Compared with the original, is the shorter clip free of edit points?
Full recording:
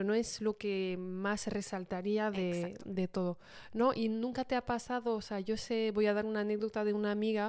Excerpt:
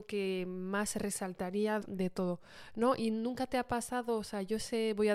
no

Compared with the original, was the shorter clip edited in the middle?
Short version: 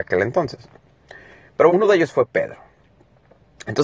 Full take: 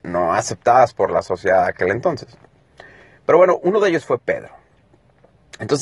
yes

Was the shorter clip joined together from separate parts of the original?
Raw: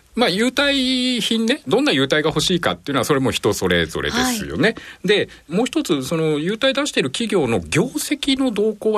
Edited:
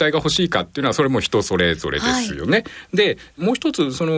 no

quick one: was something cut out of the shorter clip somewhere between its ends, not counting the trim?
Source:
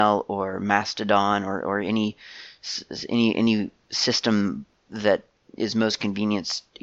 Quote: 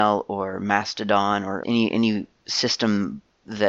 yes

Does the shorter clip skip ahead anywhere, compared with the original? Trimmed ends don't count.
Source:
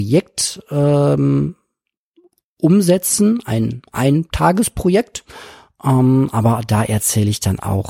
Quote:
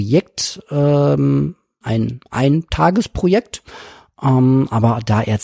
yes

